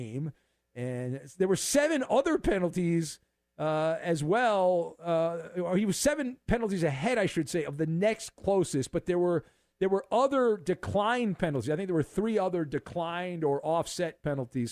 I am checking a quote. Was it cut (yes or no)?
no